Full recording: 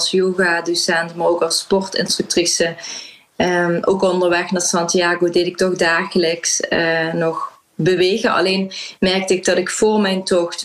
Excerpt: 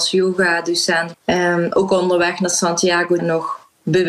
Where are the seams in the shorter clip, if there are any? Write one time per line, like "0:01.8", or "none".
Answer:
0:01.1
0:03.2